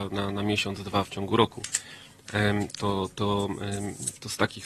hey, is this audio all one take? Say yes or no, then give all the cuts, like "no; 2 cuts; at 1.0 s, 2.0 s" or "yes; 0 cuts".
yes; 0 cuts